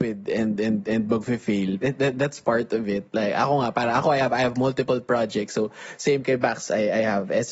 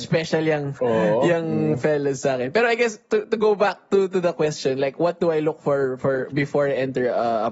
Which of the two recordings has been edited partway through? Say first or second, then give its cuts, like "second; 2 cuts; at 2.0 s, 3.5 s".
first; 1 cut; at 1.8 s